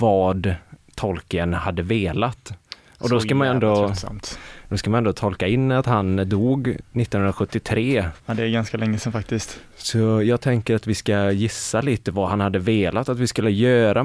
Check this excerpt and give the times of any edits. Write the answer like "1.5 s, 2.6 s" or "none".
8.2 s